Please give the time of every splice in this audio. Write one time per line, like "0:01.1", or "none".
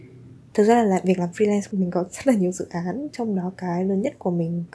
none